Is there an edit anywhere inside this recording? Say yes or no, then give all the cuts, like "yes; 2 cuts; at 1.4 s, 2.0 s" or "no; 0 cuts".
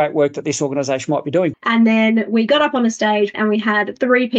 yes; 2 cuts; at 1.5 s, 3.3 s